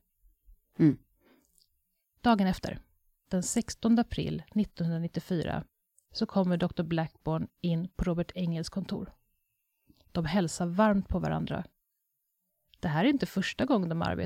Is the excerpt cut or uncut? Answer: uncut